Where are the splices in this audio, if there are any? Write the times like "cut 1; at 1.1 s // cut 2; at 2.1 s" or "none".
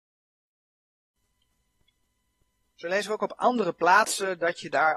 none